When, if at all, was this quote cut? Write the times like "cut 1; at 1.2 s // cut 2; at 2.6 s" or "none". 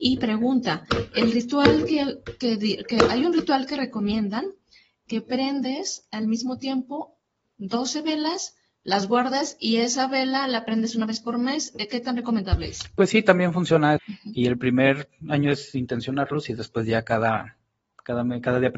cut 1; at 14.0 s